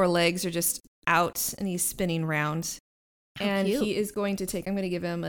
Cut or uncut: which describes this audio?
uncut